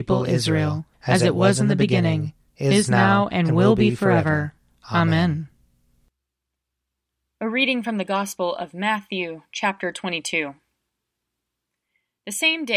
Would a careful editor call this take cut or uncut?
cut